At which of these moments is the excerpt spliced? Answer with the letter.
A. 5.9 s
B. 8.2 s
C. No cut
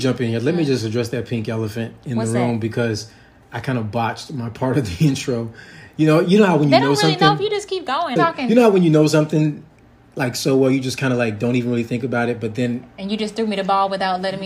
B